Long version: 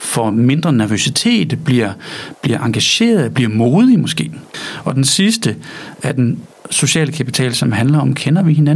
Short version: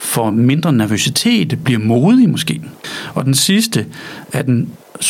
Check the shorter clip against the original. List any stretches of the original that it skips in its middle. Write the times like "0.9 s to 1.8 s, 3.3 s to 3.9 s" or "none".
1.6 s to 3.3 s

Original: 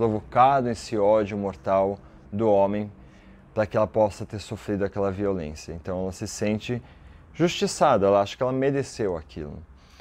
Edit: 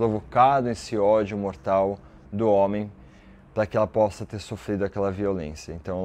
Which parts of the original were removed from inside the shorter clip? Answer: none

